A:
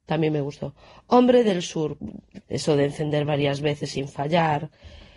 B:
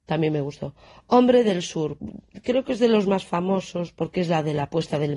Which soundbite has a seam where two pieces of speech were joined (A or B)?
A